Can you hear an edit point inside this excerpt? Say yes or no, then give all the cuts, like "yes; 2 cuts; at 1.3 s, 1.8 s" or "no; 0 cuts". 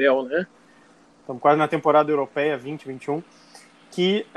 yes; 1 cut; at 1.0 s